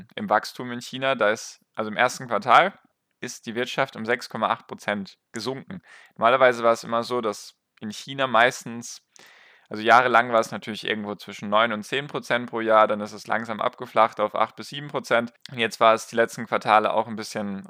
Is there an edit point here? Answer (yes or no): no